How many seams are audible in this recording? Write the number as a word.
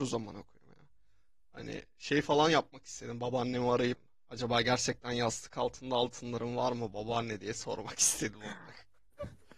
zero